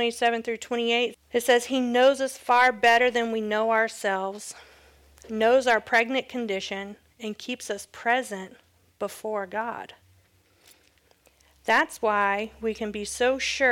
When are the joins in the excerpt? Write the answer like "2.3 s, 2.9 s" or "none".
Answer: 1.1 s